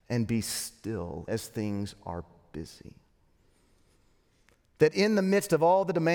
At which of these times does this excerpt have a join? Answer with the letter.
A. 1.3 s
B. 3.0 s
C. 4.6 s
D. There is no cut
A